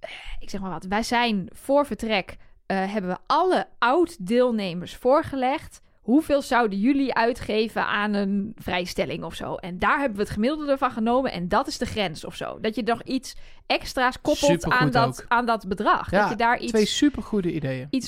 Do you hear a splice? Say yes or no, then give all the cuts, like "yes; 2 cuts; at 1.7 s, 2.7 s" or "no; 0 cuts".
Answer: no; 0 cuts